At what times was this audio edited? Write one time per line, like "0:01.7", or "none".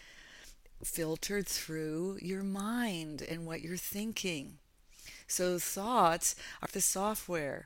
0:06.7